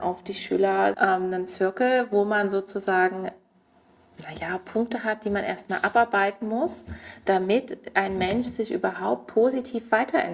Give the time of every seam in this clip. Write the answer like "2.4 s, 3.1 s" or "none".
0.9 s